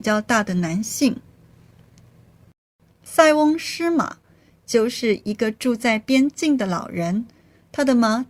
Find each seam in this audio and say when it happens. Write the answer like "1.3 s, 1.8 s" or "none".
none